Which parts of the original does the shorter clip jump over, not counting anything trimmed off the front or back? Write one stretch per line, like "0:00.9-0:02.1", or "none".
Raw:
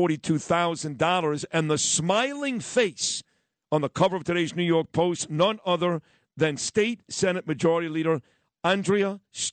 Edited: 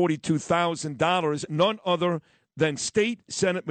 0:01.5-0:05.3